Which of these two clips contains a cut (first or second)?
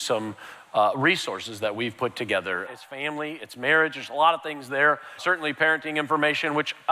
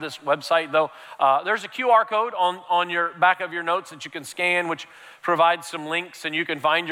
first